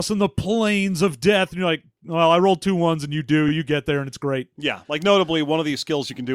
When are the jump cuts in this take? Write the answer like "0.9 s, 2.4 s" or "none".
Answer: none